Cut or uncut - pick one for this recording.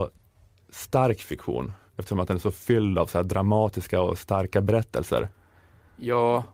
cut